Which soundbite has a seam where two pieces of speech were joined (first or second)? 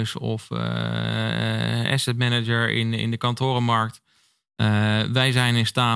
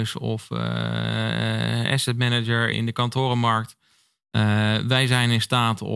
second